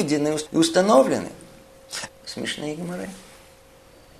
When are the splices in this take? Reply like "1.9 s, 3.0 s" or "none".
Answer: 2.1 s